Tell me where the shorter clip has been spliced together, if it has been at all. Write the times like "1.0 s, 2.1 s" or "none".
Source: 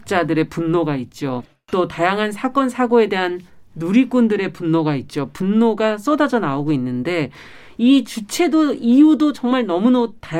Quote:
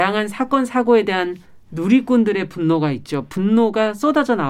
none